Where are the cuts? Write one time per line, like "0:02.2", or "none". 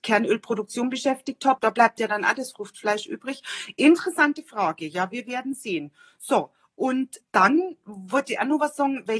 0:01.6